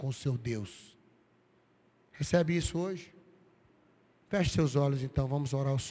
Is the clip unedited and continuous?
yes; 0 cuts

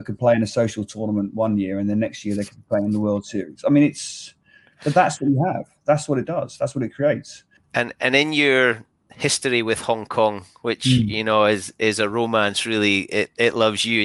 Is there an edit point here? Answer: yes; 1 cut; at 7.6 s

